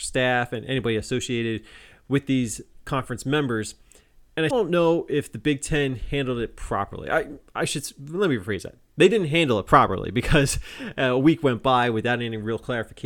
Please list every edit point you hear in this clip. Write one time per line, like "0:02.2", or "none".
0:04.5

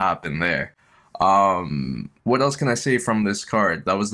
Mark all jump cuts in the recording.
0:02.2

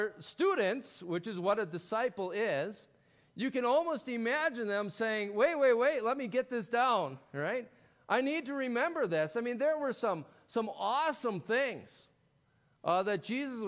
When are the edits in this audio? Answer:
none

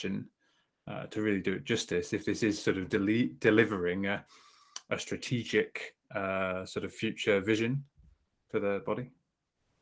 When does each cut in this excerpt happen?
none

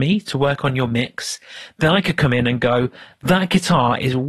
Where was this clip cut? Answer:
none

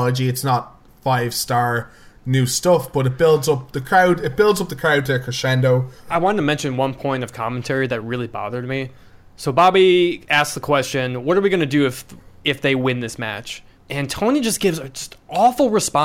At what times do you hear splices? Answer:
none

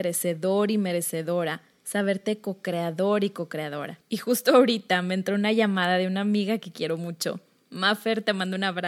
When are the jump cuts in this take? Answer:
none

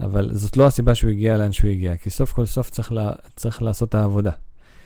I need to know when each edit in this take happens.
none

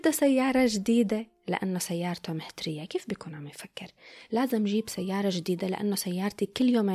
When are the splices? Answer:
none

